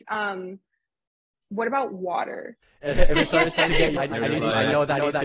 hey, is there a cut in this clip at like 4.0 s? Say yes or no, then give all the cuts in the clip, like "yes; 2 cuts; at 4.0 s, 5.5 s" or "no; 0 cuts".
yes; 2 cuts; at 2.6 s, 4.0 s